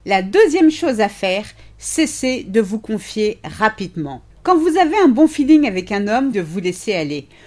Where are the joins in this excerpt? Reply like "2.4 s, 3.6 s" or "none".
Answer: 6.3 s